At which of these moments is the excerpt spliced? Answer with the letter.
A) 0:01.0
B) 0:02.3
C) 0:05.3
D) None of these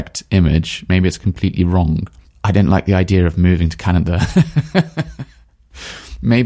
B